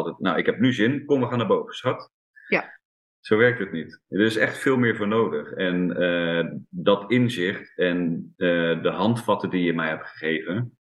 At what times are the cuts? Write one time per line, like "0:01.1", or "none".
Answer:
0:03.1